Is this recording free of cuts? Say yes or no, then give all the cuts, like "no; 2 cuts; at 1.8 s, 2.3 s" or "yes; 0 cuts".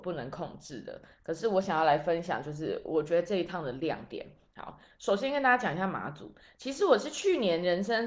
yes; 0 cuts